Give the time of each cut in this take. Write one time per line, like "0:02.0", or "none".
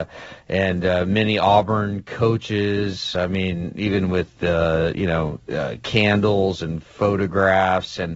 none